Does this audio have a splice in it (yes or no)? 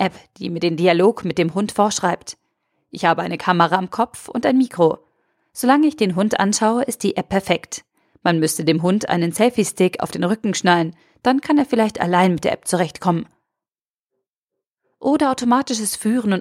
no